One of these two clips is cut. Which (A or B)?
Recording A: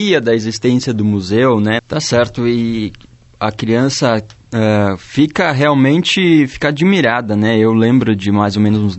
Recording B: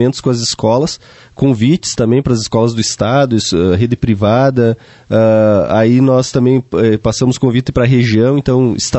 A